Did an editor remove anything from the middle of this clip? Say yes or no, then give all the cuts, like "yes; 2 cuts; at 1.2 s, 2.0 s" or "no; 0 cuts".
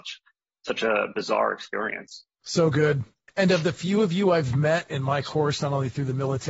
yes; 1 cut; at 2.3 s